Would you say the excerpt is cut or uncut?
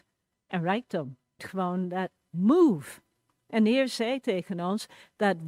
cut